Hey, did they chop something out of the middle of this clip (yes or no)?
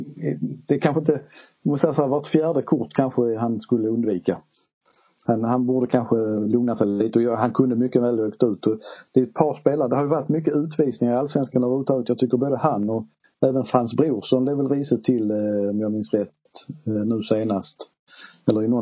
no